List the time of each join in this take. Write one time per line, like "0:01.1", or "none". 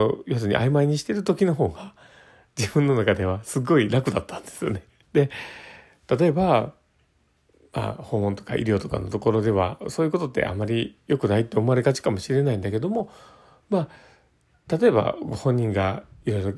0:05.0

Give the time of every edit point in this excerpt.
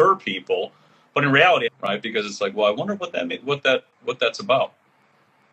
0:01.7

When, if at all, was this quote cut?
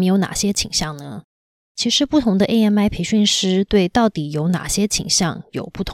none

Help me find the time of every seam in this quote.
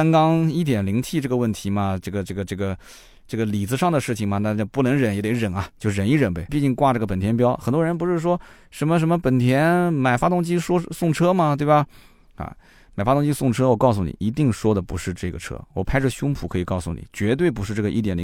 0:06.5

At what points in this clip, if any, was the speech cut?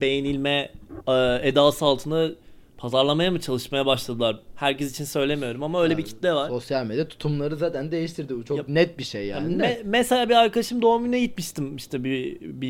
none

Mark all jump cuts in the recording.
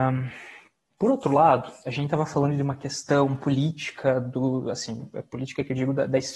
0:01.0

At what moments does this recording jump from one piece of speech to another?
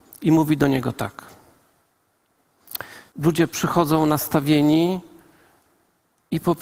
0:03.1

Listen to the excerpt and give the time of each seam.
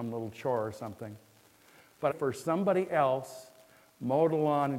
0:02.1

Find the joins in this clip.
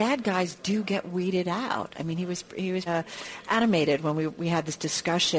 0:02.9

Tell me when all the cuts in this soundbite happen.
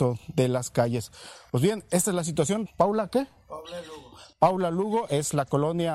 0:02.7

